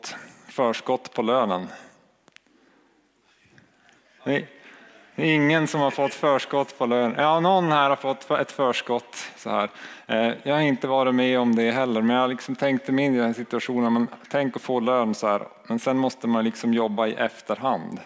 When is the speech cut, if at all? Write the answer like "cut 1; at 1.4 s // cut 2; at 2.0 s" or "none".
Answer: none

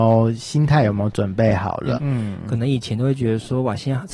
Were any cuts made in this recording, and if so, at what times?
cut 1; at 1.9 s

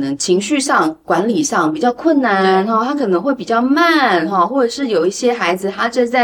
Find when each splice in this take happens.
none

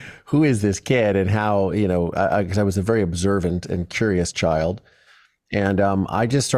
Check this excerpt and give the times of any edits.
none

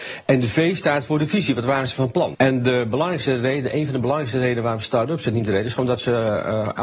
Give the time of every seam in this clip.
cut 1; at 2.3 s

